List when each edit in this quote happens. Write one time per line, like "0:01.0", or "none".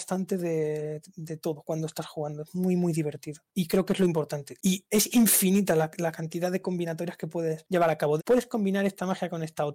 0:04.6
0:08.2